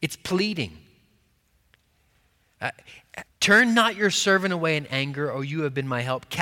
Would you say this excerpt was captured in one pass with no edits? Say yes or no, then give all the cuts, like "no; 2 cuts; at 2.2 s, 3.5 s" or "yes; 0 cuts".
no; 1 cut; at 3.3 s